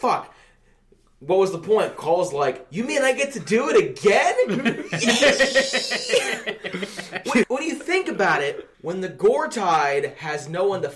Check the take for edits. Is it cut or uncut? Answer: cut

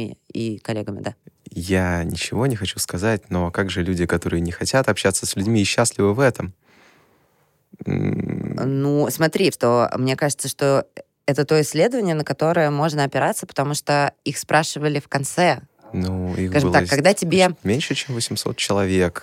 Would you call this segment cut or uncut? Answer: cut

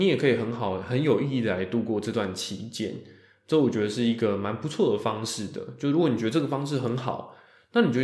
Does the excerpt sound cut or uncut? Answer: uncut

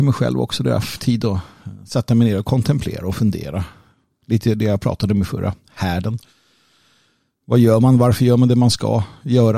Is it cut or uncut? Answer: uncut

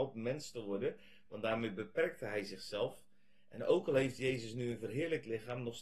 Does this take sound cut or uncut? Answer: uncut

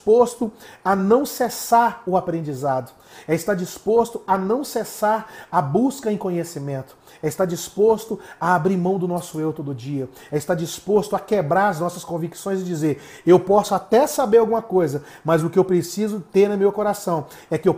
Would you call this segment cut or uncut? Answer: uncut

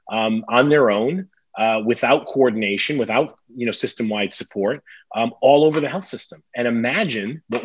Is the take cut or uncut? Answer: uncut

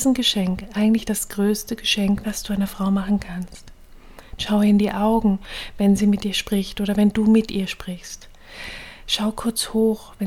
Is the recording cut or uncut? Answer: cut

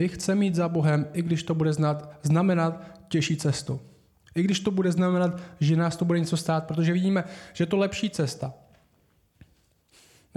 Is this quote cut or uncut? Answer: uncut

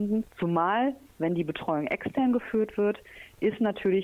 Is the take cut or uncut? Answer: uncut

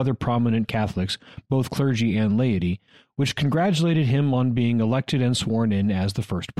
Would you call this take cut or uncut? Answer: uncut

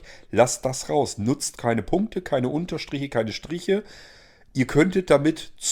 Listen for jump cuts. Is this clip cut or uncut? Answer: uncut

